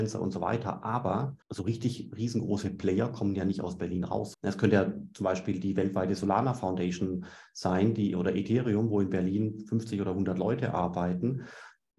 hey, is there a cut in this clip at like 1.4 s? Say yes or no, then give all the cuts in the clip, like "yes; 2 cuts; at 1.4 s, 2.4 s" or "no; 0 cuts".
yes; 2 cuts; at 1.4 s, 4.3 s